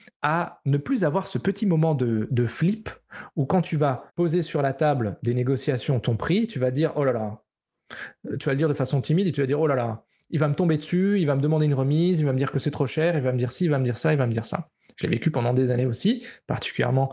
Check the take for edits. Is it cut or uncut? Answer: cut